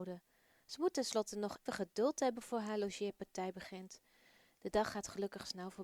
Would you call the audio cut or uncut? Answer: cut